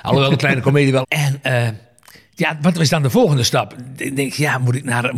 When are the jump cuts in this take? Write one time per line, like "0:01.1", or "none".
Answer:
0:01.0